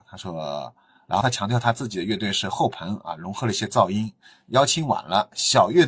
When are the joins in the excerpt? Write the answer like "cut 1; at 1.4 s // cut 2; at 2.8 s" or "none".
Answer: none